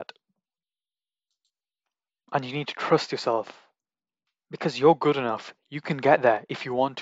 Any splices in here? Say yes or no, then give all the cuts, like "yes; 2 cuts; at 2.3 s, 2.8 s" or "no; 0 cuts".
no; 0 cuts